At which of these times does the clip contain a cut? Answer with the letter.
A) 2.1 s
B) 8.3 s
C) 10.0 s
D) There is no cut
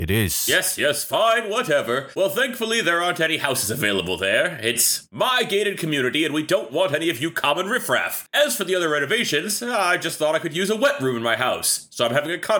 D